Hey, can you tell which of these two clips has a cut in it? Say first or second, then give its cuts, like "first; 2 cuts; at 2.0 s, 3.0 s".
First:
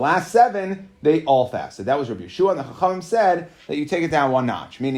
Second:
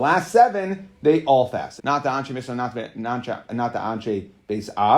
second; 1 cut; at 1.8 s